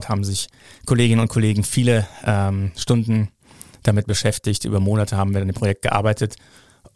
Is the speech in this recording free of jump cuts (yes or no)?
yes